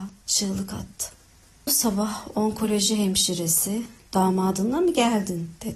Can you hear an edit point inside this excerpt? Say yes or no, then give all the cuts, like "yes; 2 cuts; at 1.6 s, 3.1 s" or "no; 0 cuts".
yes; 1 cut; at 4.1 s